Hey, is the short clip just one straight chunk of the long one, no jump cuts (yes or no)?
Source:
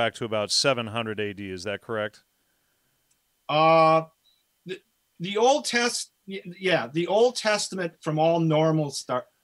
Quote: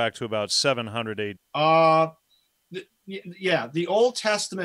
no